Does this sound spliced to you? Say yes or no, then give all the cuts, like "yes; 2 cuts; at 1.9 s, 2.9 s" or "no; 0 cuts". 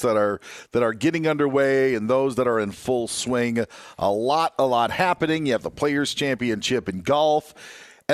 no; 0 cuts